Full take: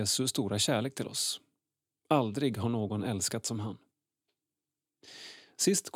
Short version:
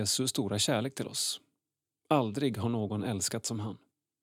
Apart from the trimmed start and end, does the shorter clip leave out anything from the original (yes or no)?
no